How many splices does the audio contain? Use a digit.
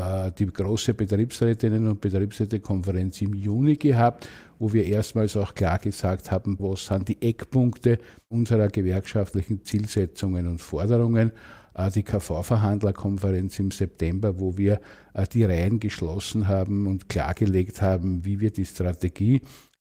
1